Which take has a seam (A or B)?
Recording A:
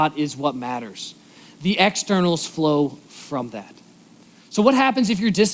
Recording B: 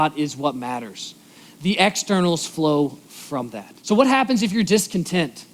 B